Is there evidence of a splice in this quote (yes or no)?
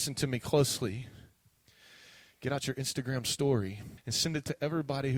yes